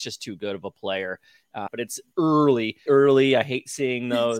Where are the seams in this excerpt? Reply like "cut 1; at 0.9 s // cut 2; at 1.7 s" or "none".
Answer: cut 1; at 1.7 s // cut 2; at 2.9 s